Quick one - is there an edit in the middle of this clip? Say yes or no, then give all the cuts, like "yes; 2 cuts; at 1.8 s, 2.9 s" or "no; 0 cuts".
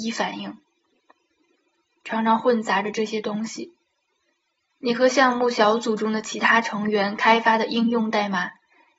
yes; 1 cut; at 2.0 s